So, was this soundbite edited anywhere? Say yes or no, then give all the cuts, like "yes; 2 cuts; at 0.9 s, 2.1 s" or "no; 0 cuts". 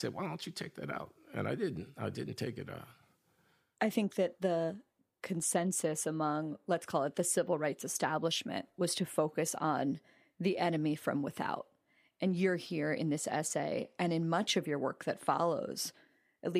no; 0 cuts